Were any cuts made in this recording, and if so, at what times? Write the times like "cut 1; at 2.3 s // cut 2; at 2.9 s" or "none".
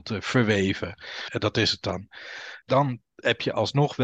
cut 1; at 1.3 s // cut 2; at 2.6 s